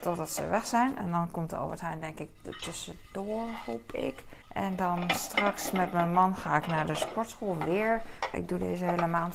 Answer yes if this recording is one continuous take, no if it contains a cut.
no